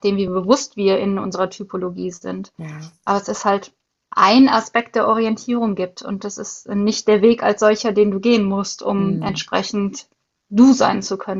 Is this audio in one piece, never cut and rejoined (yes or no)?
yes